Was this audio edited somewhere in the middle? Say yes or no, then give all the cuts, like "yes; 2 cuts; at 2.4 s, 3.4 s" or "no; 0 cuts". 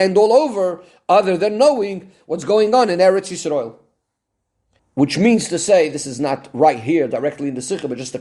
yes; 1 cut; at 4.8 s